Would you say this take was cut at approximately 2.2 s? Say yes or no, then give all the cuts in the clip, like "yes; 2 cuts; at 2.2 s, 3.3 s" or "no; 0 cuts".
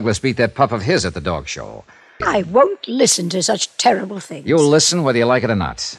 yes; 1 cut; at 2.2 s